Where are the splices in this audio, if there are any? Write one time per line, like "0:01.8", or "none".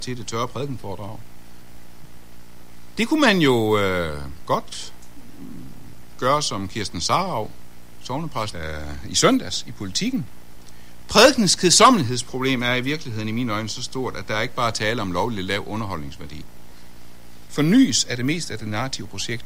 0:08.5
0:11.0
0:17.5